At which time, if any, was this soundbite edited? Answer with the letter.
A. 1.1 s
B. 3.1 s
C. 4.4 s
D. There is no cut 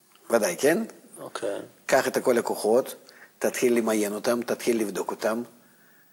D